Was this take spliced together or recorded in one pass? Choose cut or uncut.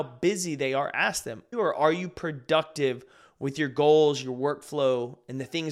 cut